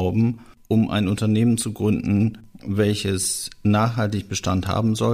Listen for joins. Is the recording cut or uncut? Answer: uncut